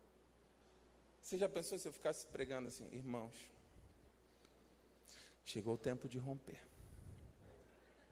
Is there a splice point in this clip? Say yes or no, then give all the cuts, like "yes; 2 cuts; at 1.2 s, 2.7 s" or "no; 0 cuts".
no; 0 cuts